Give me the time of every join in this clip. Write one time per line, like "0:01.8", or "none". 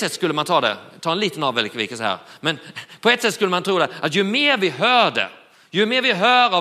none